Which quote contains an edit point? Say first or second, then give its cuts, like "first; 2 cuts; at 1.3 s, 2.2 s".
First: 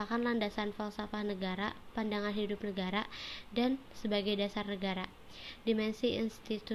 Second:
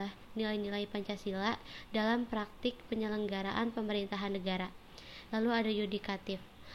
second; 1 cut; at 5.3 s